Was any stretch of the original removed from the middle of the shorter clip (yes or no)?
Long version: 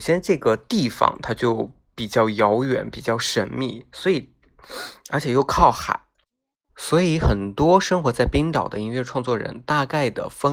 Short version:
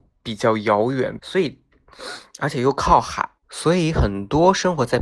yes